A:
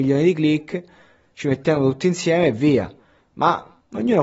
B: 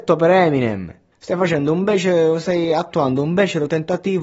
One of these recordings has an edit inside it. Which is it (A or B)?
B